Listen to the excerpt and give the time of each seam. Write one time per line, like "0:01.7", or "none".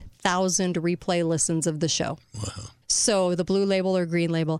0:02.8